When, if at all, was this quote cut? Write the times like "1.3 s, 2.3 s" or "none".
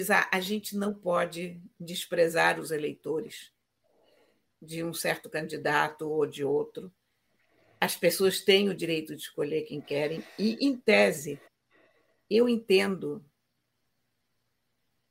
none